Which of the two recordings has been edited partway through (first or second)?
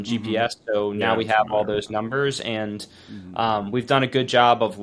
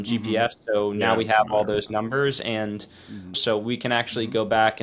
second